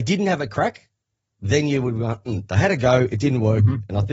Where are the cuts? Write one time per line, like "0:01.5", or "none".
none